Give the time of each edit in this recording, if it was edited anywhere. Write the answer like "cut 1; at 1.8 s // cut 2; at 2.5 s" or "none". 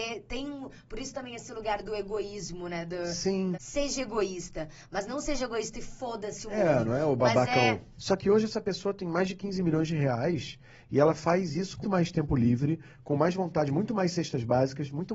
cut 1; at 3.5 s // cut 2; at 8.0 s // cut 3; at 11.8 s